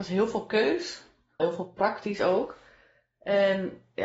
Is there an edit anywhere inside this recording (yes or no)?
yes